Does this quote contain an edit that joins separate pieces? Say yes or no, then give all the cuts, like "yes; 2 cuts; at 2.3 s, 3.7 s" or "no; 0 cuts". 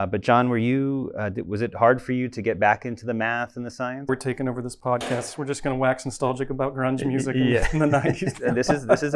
yes; 1 cut; at 4.1 s